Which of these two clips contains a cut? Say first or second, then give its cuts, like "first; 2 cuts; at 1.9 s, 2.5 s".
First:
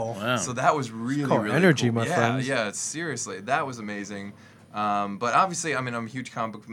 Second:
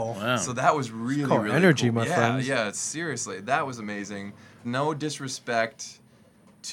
second; 1 cut; at 4.6 s